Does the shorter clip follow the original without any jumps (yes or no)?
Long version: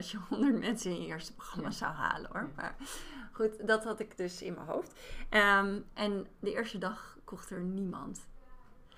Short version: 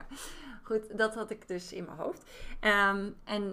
yes